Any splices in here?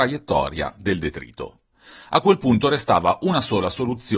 no; 0 cuts

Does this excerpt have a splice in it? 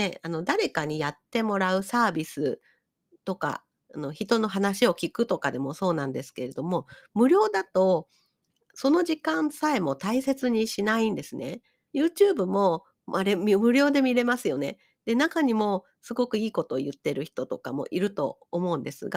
yes; 1 cut; at 11.9 s

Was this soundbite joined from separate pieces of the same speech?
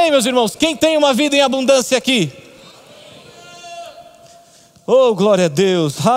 no; 0 cuts

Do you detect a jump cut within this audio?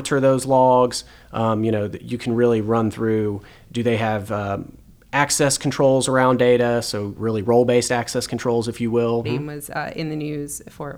yes; 1 cut; at 9.2 s

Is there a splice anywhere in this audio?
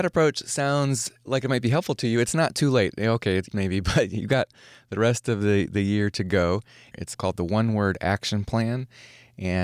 yes; 2 cuts; at 3.5 s, 6.9 s

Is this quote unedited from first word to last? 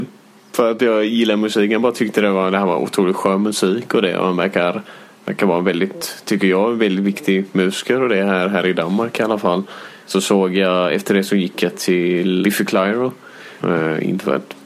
no; 3 cuts; at 10.0 s, 12.4 s, 13.6 s

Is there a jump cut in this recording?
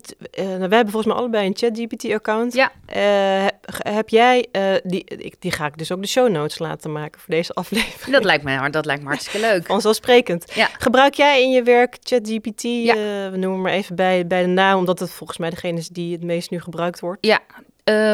no; 0 cuts

